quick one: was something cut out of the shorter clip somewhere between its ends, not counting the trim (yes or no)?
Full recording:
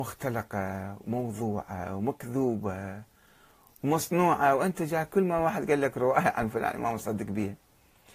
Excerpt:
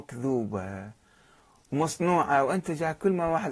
no